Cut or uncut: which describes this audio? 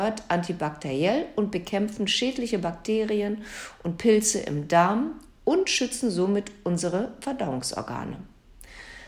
uncut